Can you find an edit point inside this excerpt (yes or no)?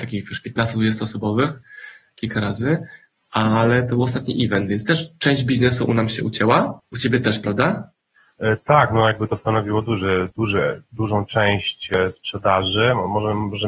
yes